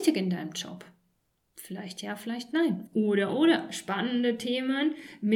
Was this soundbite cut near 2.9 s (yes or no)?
yes